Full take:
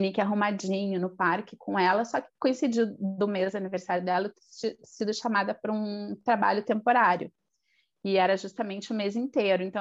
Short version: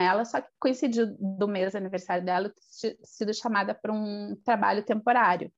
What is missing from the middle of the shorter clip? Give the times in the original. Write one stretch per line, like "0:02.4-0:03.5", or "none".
none